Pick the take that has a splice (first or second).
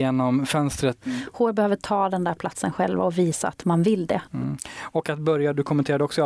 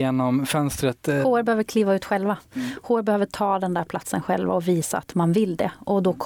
first